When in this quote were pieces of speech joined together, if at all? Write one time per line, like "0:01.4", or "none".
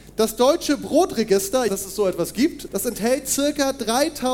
0:01.7
0:02.7